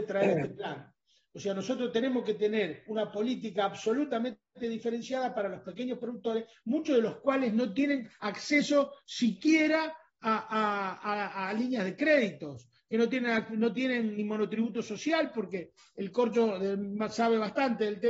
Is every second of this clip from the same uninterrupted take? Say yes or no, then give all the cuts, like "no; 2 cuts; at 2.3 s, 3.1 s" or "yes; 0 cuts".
yes; 0 cuts